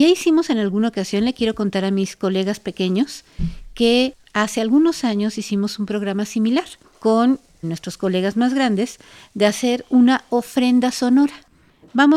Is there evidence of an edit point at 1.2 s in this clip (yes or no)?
no